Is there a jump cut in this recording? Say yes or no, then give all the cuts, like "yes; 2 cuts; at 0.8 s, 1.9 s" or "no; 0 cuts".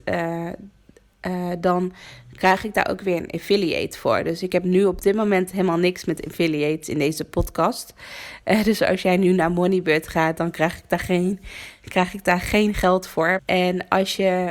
yes; 1 cut; at 13.4 s